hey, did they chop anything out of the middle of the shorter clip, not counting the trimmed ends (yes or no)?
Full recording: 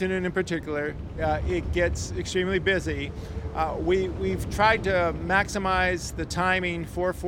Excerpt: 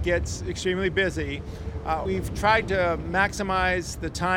yes